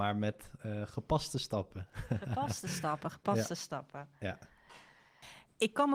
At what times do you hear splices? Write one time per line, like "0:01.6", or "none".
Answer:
none